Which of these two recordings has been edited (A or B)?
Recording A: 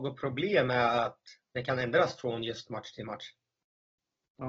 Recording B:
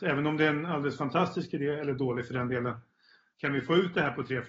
B